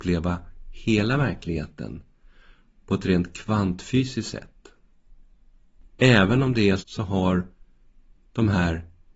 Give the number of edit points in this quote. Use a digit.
1